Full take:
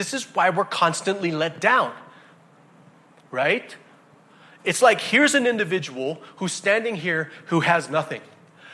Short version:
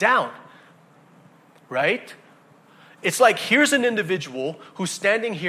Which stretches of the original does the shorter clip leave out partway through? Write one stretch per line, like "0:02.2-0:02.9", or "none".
none